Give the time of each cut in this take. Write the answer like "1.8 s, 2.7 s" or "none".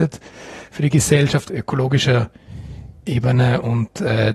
1.5 s